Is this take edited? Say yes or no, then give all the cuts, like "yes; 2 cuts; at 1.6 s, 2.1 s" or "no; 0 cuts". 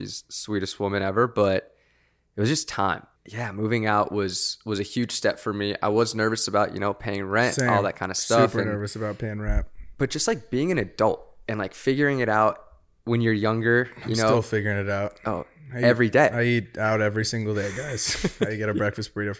no; 0 cuts